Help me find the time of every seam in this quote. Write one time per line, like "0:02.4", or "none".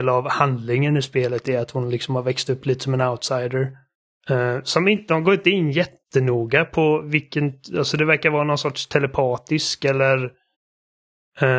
0:04.1